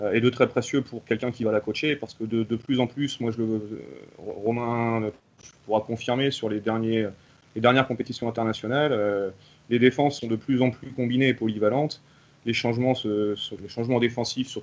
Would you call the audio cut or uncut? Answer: cut